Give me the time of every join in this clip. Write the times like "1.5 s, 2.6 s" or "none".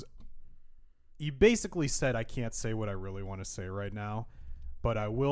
none